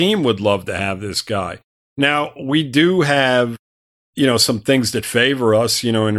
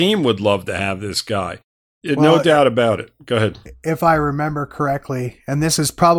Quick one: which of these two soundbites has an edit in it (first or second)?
second